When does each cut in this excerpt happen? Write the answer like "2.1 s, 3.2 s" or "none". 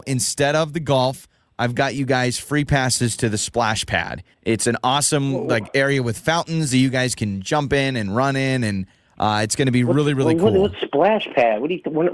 none